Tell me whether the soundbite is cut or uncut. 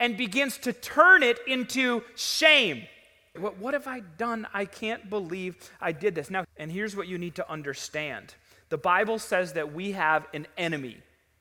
cut